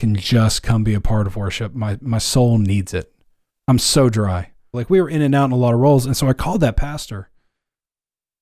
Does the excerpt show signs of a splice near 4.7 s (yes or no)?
yes